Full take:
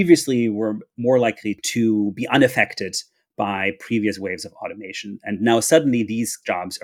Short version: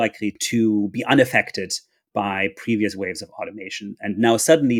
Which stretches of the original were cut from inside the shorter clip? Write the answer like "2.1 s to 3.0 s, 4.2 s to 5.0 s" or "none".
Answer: none

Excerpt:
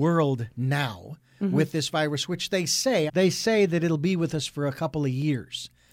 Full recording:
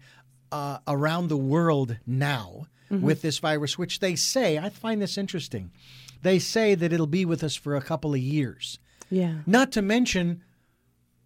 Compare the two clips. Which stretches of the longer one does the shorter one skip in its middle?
4.6 s to 6.2 s

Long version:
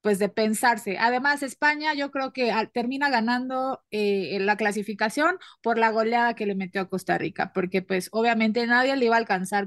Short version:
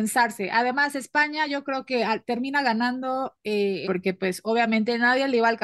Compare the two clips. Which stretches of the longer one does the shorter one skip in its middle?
4.3 s to 7.5 s

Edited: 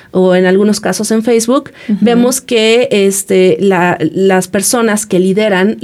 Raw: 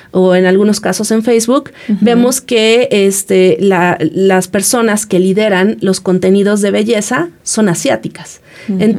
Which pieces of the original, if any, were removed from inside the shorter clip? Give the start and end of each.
none

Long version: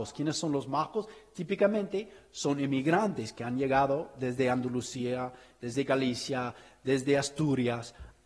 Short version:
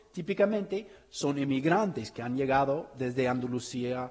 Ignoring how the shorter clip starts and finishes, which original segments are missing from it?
none

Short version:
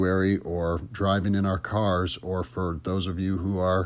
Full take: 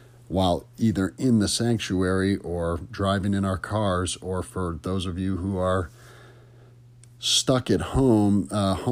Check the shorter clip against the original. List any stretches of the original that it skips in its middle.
none

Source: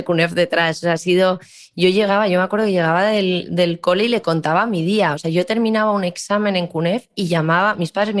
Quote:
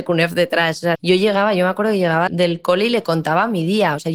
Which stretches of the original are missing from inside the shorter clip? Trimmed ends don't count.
0.9 s to 1.7 s, 3.0 s to 3.5 s

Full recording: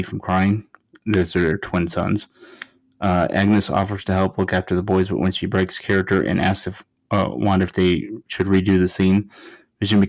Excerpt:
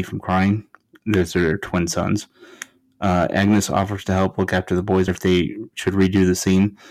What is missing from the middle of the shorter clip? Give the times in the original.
5.1 s to 7.6 s

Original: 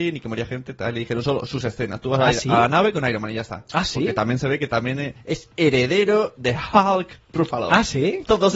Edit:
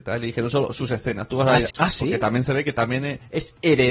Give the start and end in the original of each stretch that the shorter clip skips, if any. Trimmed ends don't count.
2.4 s to 3.7 s

